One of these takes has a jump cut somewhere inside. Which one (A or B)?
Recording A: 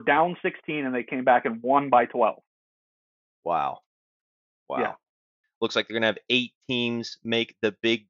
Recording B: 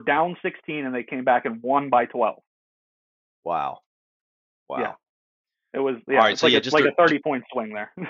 A